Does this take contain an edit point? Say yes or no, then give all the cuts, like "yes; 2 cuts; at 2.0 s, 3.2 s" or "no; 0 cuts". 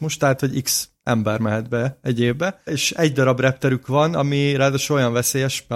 yes; 1 cut; at 2.7 s